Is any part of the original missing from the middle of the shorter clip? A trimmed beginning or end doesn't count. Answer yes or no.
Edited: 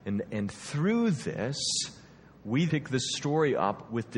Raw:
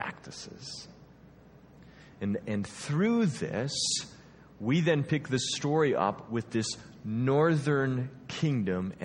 yes